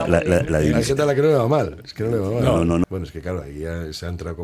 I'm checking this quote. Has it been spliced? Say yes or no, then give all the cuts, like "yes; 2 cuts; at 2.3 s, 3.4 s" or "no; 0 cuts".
yes; 1 cut; at 2.8 s